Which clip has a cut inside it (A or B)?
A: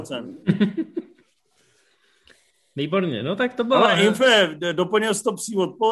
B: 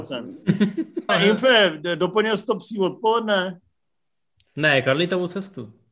B